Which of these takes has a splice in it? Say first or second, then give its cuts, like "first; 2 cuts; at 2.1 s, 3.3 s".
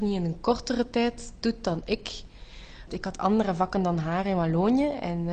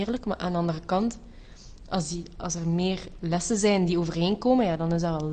first; 1 cut; at 2.9 s